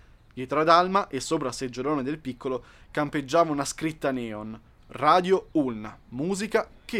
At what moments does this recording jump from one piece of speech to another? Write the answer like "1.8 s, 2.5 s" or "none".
none